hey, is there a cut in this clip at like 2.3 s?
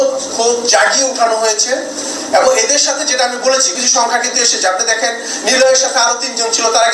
no; 1 cut; at 3.7 s

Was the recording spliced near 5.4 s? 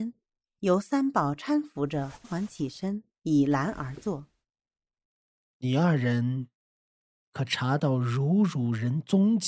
no; 1 cut; at 2.2 s

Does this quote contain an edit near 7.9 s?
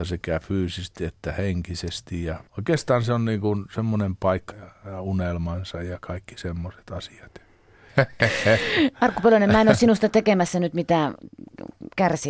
yes; 3 cuts; at 2.5 s, 4.5 s, 7.9 s

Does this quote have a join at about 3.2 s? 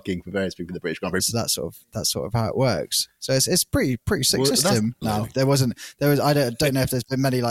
no; 2 cuts; at 1.2 s, 5.0 s

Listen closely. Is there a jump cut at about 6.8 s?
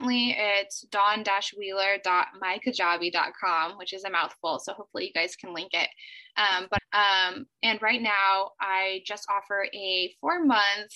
yes; 1 cut; at 6.8 s

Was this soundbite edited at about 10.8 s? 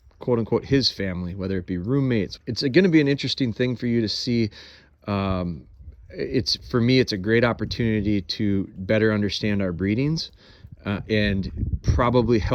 no; 2 cuts; at 2.4 s, 5.0 s

